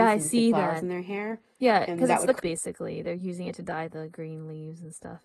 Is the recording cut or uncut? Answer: cut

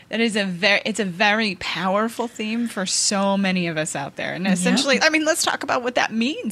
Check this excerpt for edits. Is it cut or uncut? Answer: uncut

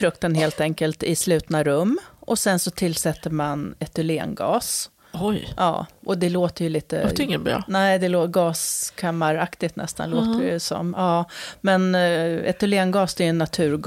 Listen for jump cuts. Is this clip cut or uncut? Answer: uncut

